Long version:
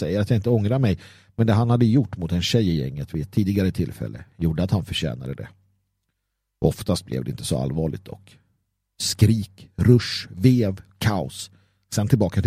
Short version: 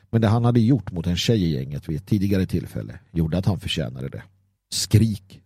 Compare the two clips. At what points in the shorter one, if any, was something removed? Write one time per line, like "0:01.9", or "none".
0:04.6